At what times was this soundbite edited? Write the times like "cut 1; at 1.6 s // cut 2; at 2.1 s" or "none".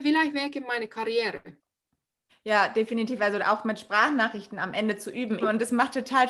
cut 1; at 2.3 s // cut 2; at 5.4 s